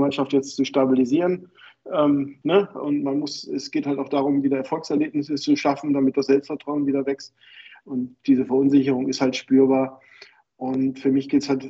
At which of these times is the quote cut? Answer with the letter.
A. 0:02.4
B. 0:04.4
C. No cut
A